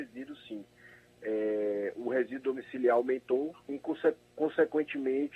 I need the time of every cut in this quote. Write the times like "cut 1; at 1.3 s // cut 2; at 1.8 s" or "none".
cut 1; at 3.6 s